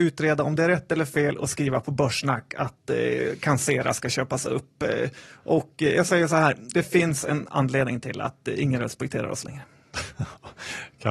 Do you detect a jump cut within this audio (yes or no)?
no